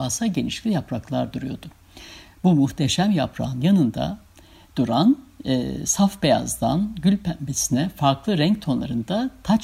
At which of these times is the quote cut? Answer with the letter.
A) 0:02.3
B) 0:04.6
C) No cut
C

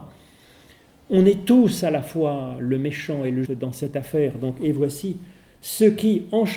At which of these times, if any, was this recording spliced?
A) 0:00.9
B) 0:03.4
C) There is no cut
B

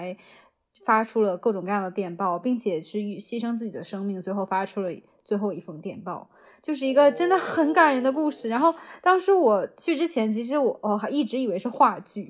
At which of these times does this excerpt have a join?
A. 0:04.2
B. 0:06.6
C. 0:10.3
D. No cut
D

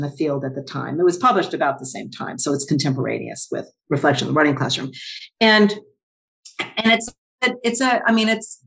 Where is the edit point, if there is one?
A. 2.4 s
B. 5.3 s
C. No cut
C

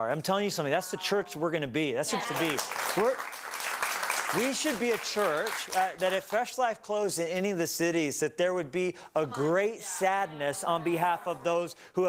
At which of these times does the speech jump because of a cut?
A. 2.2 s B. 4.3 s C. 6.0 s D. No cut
A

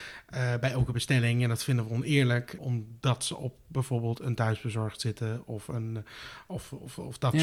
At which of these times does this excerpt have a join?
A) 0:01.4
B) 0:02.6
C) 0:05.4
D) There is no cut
B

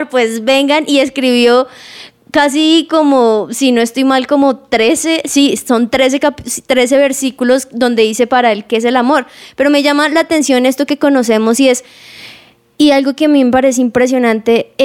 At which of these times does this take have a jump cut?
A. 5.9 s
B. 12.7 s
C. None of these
B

